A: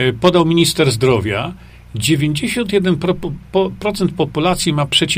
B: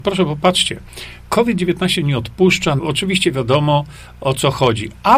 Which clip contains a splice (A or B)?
B